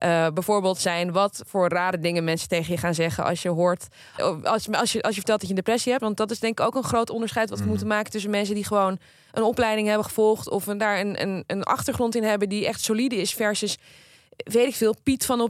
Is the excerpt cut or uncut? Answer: cut